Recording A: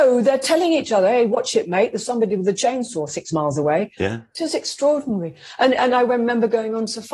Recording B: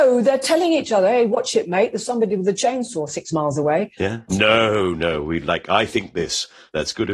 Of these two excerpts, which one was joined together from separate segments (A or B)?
B